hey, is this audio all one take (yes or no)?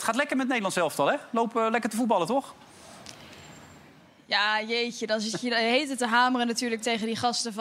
yes